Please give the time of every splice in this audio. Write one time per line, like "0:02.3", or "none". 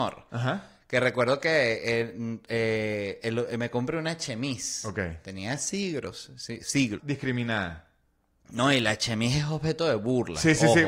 0:07.0